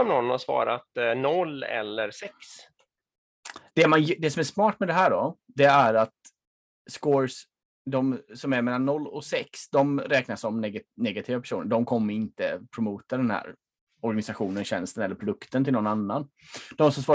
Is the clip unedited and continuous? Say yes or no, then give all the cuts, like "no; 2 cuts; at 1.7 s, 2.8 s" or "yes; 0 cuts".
no; 1 cut; at 3.7 s